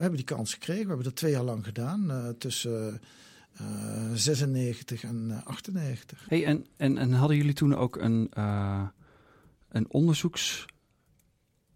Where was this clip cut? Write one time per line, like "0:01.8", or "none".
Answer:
0:06.3